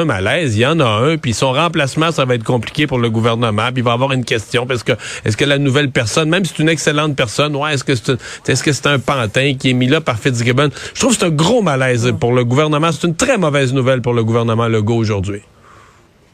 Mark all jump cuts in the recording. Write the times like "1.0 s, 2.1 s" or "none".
none